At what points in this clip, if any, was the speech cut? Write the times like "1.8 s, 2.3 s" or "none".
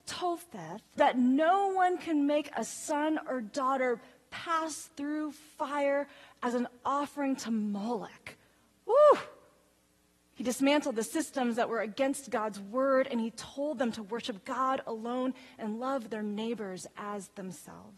1.0 s, 10.3 s